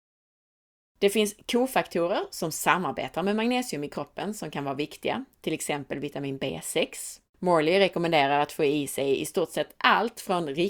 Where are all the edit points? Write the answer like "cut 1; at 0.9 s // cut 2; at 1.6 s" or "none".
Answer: cut 1; at 7.3 s